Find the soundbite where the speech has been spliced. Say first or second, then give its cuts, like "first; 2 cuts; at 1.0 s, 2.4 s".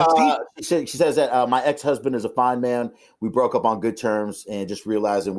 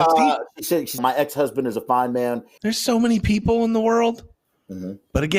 second; 2 cuts; at 1.0 s, 2.6 s